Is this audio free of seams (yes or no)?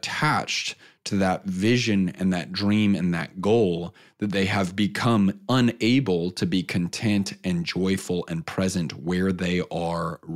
yes